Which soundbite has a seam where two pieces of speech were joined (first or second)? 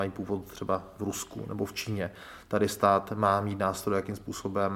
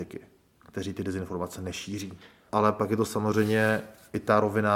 second